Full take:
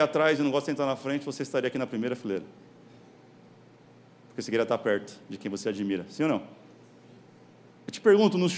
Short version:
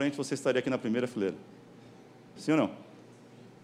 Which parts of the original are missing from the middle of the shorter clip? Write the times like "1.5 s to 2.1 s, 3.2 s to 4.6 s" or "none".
3.4 s to 6.1 s